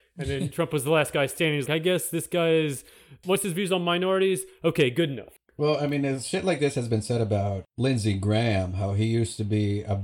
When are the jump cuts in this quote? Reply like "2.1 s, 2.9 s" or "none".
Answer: 1.6 s